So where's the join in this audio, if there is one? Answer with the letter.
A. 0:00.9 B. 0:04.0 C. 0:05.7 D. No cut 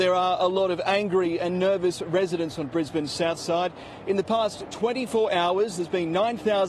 D